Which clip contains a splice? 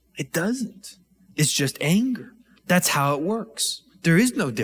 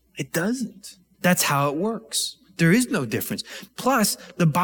second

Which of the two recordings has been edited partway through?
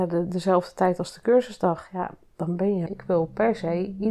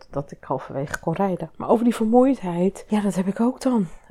first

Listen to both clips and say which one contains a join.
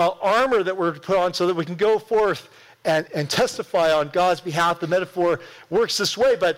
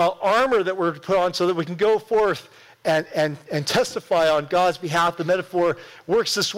first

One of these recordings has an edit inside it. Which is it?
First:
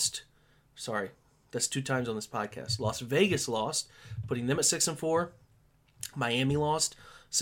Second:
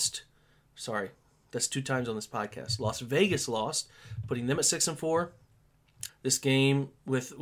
second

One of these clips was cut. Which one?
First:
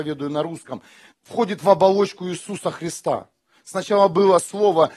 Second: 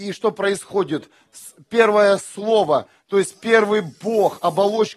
first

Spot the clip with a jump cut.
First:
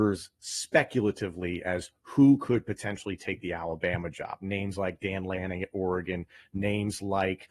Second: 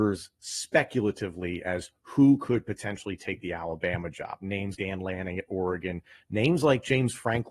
second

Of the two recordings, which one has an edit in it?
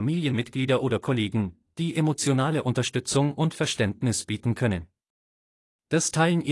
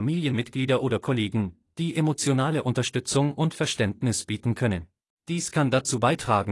second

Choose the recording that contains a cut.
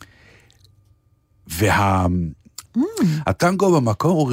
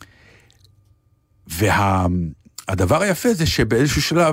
first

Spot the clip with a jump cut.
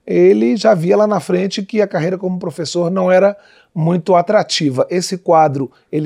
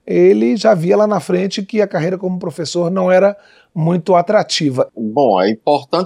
second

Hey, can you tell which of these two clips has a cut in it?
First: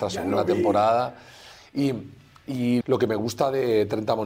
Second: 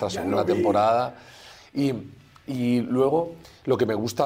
first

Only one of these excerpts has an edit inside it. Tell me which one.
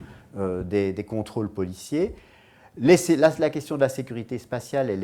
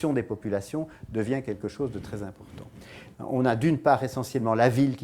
second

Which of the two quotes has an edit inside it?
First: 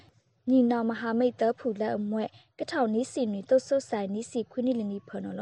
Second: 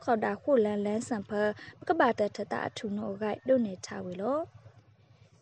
second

